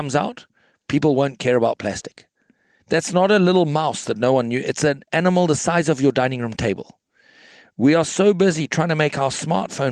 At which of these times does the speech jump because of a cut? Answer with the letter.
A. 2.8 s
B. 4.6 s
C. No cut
A